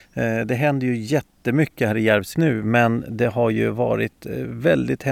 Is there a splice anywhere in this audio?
yes; 1 cut; at 2.3 s

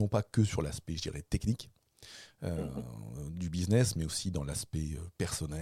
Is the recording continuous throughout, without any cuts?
yes; 0 cuts

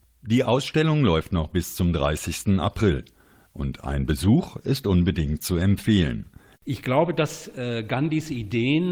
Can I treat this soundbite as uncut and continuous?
no; 1 cut; at 6.5 s

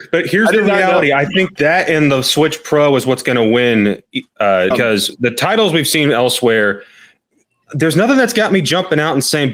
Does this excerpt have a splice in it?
yes; 2 cuts; at 1.6 s, 4.7 s

